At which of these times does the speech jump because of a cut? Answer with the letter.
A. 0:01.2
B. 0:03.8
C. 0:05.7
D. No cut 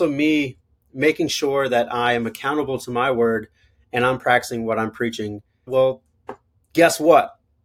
C